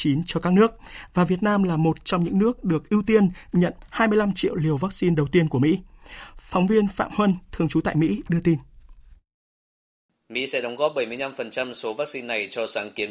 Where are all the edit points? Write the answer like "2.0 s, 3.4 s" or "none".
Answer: none